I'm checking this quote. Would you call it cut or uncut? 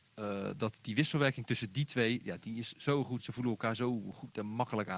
uncut